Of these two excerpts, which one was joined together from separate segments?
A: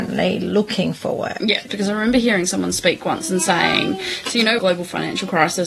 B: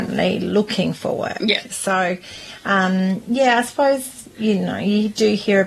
A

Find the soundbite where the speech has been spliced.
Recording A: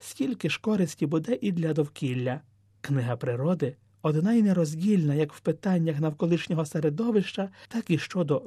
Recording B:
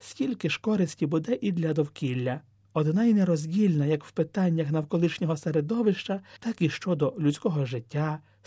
B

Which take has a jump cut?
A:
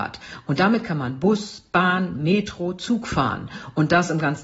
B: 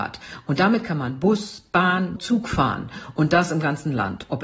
B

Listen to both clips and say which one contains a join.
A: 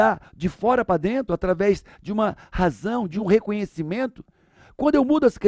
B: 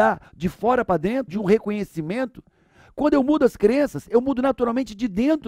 B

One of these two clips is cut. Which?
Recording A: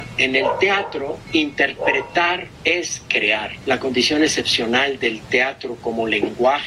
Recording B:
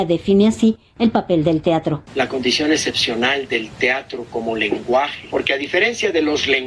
A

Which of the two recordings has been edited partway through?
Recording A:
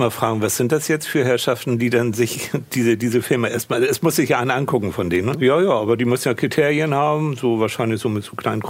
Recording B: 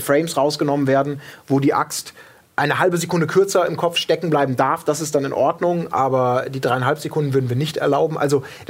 A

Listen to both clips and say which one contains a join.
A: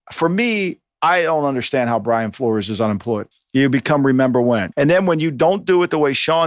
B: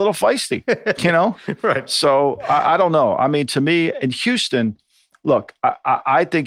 A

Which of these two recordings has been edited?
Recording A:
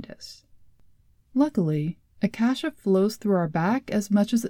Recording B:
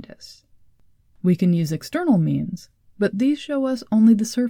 A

